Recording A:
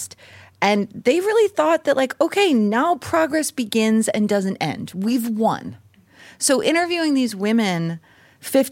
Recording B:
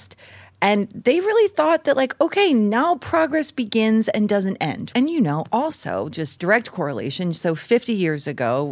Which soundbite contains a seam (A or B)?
B